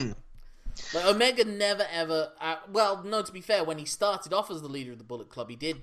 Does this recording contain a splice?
no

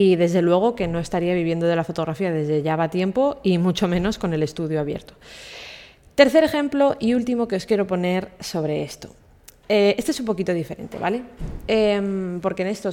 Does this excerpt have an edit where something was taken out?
no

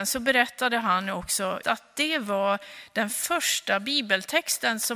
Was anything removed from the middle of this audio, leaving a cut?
yes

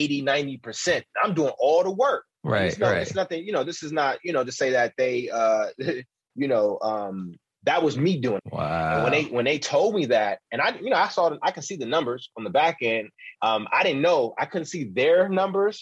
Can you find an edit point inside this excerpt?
yes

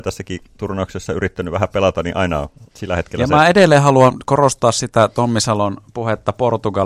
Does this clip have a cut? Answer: yes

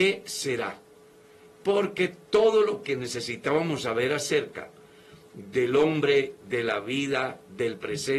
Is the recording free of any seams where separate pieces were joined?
yes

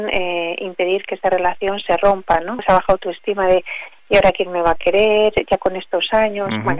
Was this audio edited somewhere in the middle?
yes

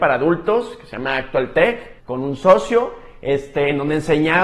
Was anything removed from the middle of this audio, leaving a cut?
yes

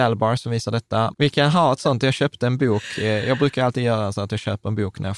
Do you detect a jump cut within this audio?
yes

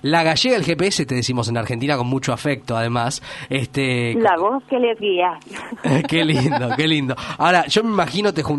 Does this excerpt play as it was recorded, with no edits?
yes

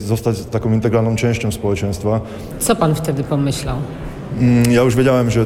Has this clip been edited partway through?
yes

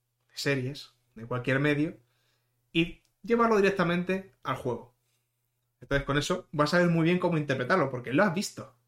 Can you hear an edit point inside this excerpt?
no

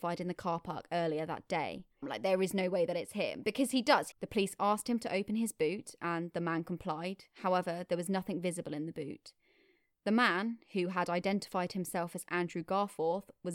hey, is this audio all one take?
no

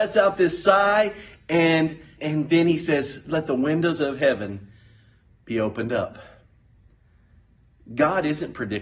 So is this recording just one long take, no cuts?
no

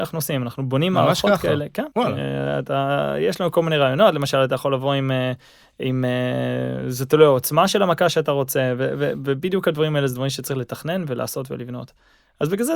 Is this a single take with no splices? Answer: no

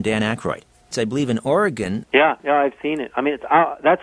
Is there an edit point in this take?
yes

